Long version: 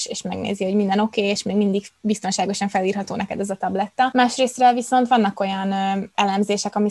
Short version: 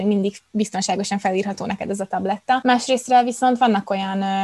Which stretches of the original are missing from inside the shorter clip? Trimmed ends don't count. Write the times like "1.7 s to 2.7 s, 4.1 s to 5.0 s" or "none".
none